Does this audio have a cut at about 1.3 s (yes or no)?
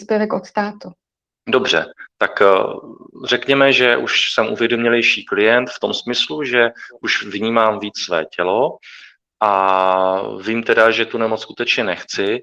yes